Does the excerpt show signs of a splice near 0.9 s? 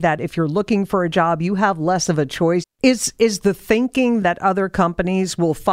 no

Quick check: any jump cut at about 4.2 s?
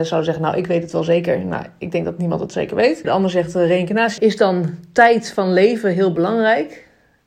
yes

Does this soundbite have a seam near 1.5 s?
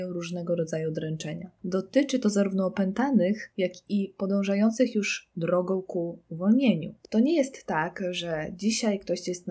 no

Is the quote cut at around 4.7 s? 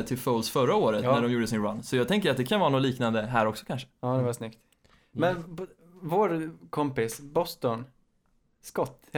no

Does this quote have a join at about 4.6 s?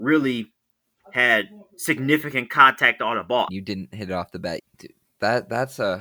yes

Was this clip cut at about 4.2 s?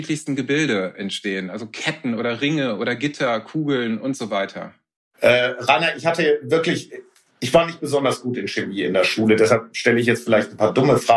no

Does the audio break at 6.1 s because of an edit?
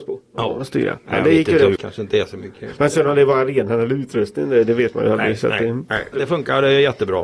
yes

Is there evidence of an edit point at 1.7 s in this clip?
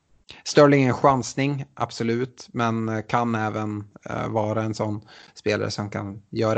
no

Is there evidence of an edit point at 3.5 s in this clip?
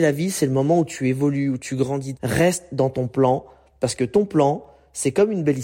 no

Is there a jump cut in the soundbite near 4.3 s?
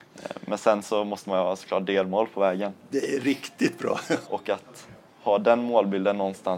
yes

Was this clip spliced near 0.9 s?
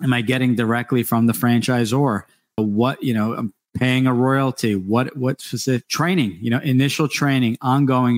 no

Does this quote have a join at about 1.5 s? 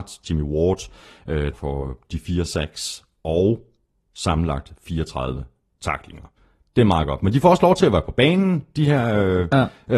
yes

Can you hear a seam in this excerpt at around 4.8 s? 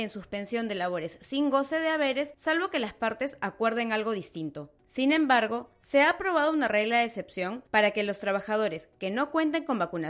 no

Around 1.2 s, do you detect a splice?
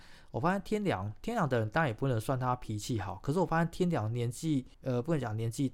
no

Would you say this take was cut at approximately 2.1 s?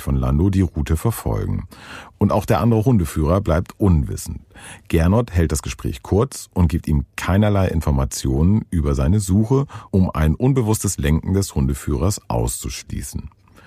no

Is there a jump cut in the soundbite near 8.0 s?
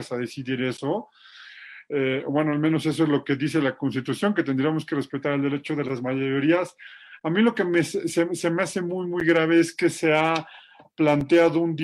no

